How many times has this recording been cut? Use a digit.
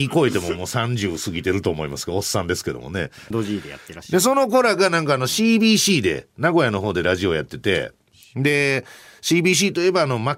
1